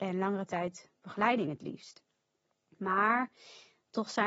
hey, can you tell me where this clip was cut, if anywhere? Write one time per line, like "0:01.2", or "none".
none